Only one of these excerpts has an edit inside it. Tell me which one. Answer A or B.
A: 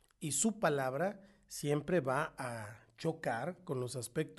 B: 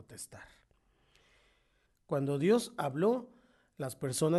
B